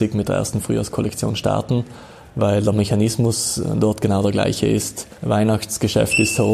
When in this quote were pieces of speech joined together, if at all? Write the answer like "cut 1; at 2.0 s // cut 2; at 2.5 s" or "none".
cut 1; at 5.2 s